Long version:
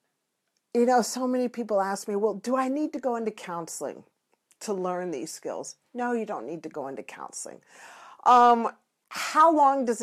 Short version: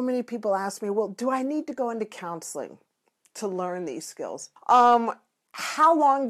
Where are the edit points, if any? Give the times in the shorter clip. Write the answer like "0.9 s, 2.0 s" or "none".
4.6 s